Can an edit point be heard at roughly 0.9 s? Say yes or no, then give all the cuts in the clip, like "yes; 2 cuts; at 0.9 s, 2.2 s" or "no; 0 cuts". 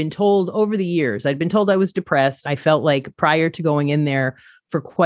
no; 1 cut; at 2.4 s